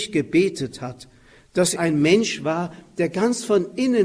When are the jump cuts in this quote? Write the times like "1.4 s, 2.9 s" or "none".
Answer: 1.8 s